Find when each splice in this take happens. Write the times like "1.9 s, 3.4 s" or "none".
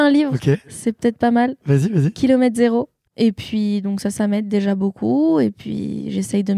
3.1 s